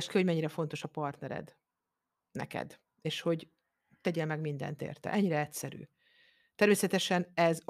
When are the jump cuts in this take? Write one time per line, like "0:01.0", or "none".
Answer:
none